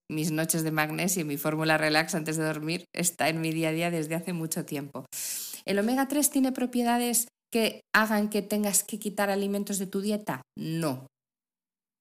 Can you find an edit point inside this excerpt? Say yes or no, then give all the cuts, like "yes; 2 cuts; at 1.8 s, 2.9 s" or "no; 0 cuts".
no; 0 cuts